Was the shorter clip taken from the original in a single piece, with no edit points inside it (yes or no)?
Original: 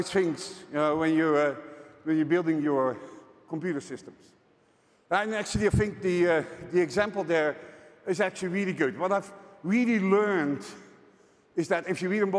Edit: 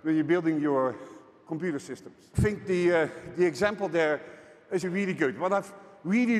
no